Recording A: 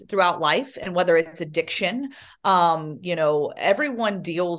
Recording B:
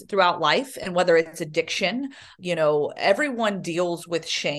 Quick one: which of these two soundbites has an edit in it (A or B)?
B